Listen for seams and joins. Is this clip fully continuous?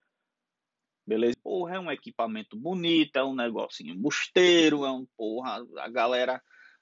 no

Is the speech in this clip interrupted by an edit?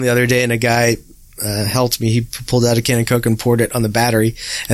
no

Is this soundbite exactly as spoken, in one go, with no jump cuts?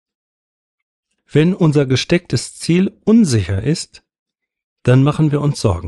no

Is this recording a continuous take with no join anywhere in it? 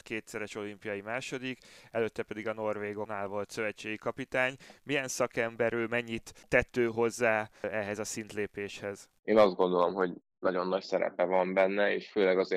yes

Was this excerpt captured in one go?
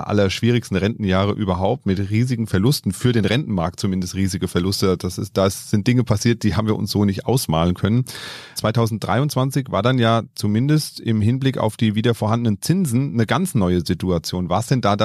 no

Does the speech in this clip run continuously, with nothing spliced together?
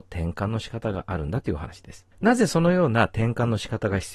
no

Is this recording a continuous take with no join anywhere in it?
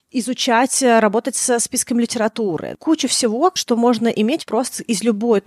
yes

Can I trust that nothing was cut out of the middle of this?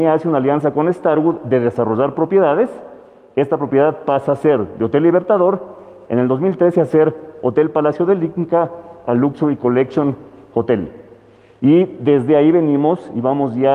yes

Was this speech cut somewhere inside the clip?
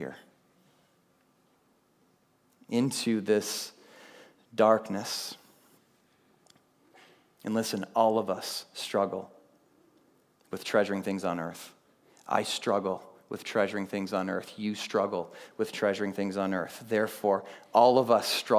no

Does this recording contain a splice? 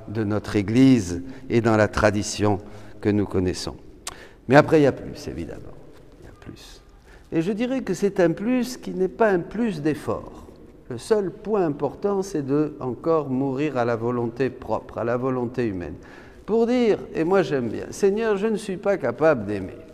no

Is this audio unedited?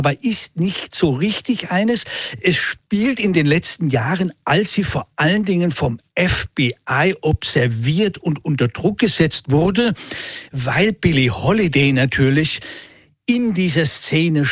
yes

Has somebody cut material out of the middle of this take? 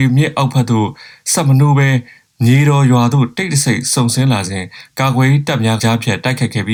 yes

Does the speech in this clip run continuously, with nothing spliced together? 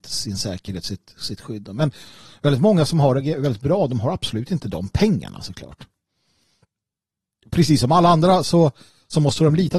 yes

